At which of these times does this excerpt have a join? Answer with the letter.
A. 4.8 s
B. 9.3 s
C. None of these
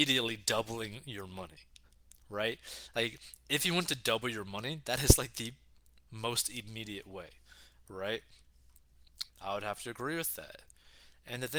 B